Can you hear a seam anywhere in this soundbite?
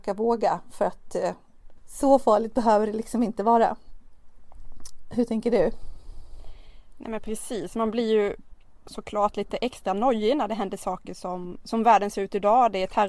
no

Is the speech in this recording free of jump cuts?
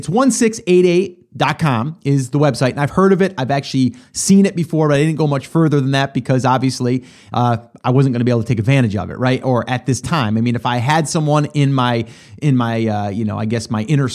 yes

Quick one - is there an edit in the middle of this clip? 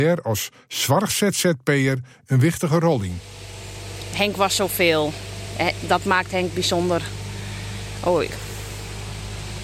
no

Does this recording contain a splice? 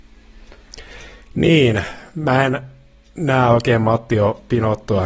no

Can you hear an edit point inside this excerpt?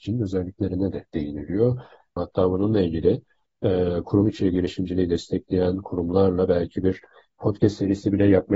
yes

